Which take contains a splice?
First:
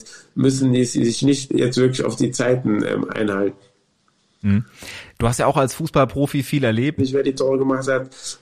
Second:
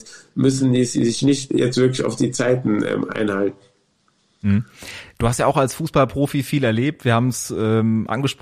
first; 1 cut; at 7.0 s

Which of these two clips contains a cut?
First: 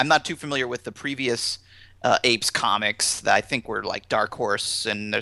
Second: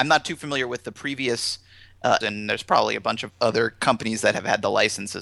second; 2 cuts; at 2.2 s, 3.3 s

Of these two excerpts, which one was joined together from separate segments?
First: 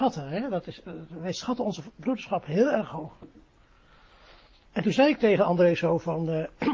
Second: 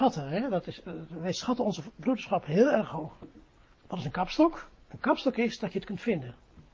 second; 1 cut; at 3.7 s

